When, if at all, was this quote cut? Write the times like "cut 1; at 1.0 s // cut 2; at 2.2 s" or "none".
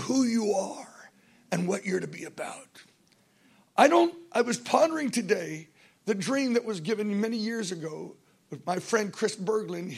none

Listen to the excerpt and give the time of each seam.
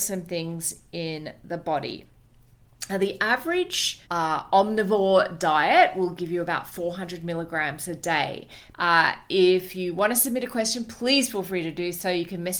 cut 1; at 4.0 s // cut 2; at 8.7 s

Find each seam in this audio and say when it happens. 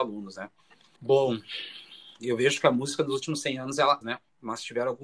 cut 1; at 1.0 s // cut 2; at 4.0 s

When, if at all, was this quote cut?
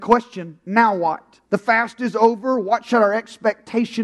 cut 1; at 1.5 s

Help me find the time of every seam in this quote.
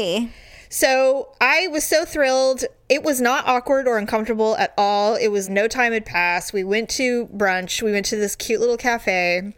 cut 1; at 5.5 s

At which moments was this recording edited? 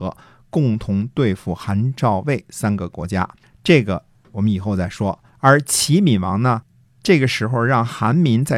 cut 1; at 5.3 s

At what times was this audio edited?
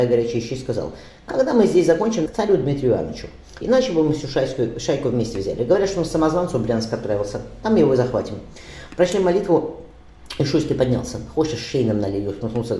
cut 1; at 2.3 s // cut 2; at 3.6 s

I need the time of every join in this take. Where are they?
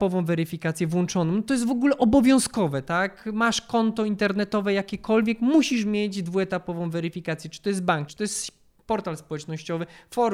cut 1; at 8.1 s

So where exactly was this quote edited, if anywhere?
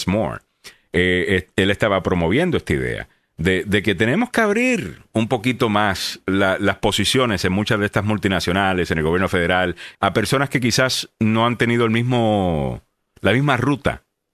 cut 1; at 9.9 s

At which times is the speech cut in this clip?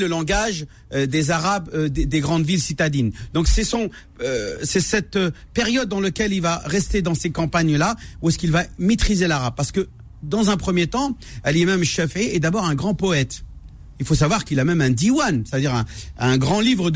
none

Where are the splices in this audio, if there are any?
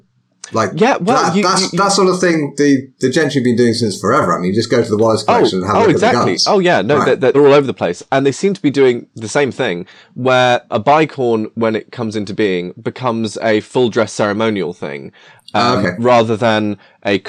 cut 1; at 7.3 s // cut 2; at 10.7 s

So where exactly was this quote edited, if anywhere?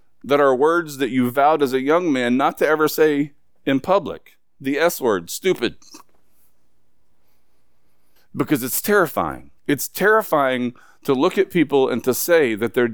cut 1; at 8.2 s // cut 2; at 9.6 s

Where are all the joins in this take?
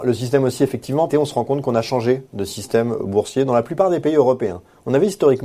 cut 1; at 1.1 s

